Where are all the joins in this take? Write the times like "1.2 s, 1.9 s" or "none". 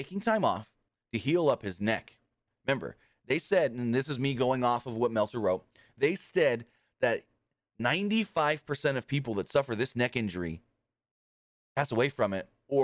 2.5 s